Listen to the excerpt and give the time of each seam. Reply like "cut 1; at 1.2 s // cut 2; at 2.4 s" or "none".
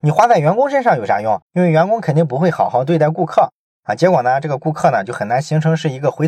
cut 1; at 1.4 s